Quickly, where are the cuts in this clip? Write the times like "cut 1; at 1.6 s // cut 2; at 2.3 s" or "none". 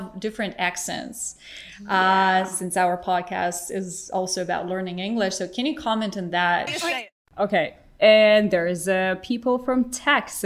cut 1; at 6.7 s

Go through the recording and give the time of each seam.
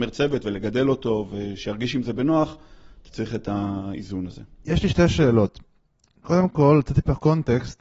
none

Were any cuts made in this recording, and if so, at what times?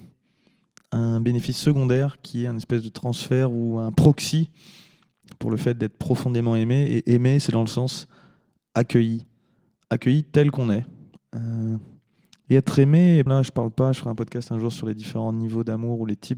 cut 1; at 11.2 s // cut 2; at 13.3 s

